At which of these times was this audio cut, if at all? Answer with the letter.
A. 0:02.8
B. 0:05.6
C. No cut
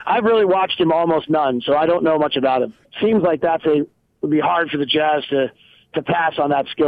A